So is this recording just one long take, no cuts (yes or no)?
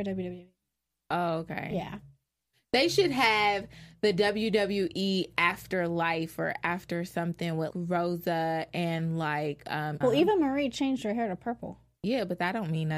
no